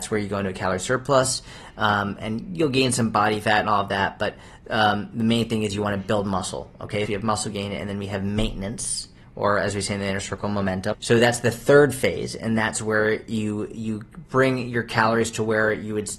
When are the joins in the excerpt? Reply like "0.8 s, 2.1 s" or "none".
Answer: 7.1 s, 10.9 s